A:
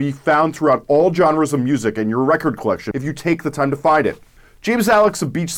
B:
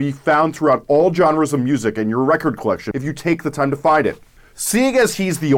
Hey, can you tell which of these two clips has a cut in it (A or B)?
B